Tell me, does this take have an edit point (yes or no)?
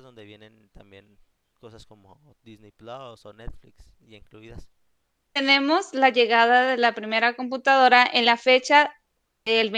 yes